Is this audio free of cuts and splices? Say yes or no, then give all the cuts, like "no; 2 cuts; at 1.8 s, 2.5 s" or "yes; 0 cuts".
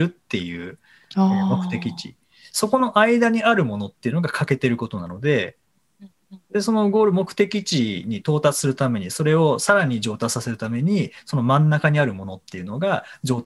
yes; 0 cuts